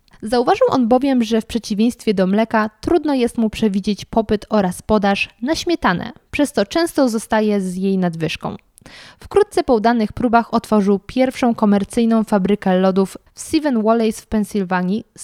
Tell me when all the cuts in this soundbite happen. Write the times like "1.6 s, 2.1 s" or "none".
9.1 s